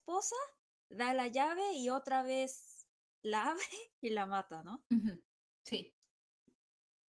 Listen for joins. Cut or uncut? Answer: uncut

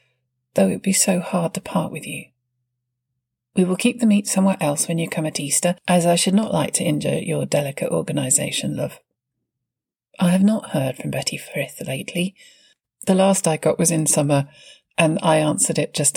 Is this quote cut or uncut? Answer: uncut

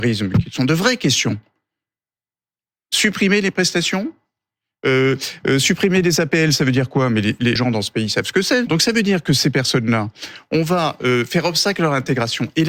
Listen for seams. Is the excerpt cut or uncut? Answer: cut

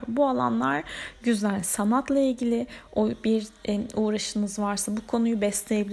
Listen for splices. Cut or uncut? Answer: uncut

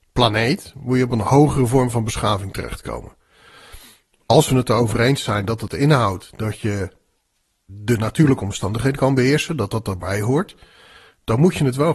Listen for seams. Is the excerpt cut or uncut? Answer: uncut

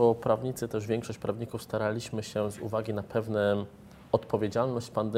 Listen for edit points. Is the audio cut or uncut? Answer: uncut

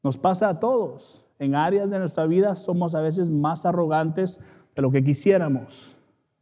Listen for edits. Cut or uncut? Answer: uncut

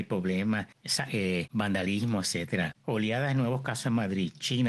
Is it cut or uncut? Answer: uncut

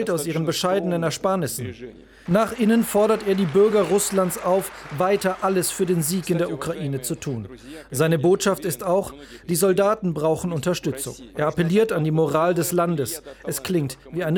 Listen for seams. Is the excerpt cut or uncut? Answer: cut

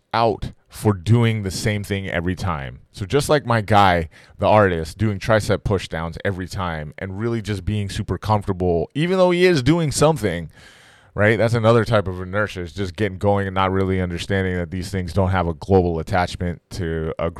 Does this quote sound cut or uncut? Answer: uncut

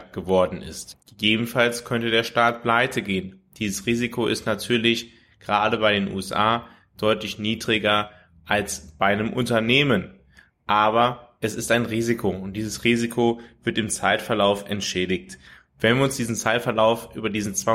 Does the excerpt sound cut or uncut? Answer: cut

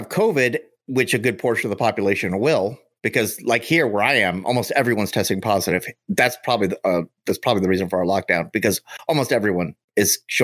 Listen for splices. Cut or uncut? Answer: uncut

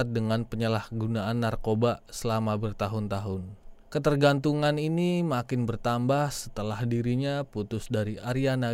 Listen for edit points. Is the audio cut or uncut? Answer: cut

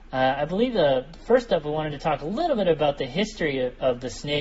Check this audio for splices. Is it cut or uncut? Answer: uncut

